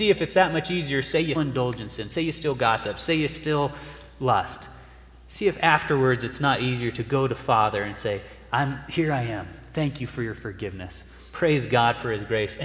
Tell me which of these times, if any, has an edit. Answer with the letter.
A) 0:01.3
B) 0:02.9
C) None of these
A